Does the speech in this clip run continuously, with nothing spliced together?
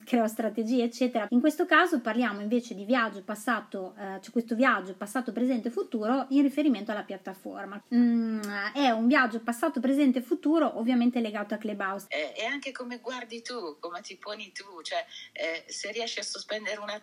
no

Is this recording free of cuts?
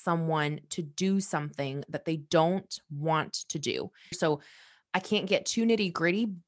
no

